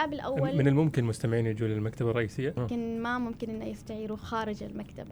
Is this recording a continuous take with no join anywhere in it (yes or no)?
no